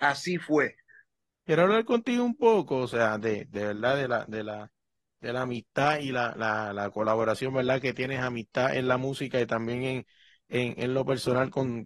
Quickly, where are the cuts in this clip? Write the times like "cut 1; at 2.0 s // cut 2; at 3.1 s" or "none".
cut 1; at 1.4 s